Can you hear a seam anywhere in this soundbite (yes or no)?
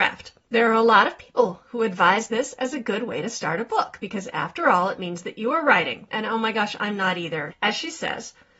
yes